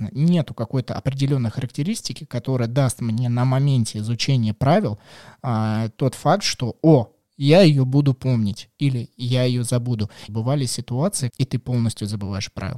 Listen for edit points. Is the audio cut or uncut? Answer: cut